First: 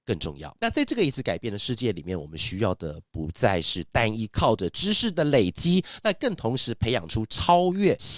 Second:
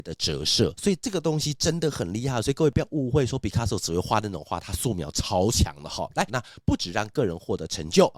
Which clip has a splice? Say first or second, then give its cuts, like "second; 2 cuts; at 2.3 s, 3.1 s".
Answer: second; 1 cut; at 6.3 s